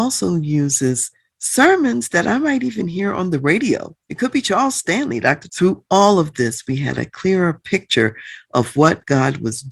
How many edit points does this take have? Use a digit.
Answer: 2